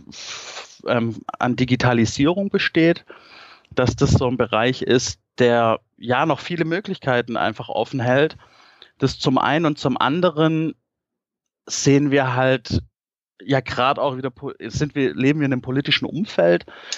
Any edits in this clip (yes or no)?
no